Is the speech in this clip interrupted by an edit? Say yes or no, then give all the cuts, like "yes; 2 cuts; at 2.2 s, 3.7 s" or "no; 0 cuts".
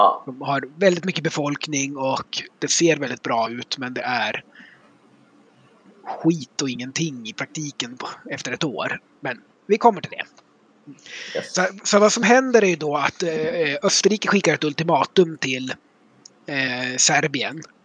no; 0 cuts